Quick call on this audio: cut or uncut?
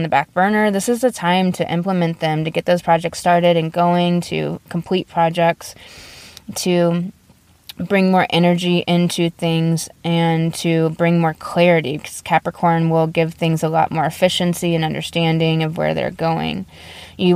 uncut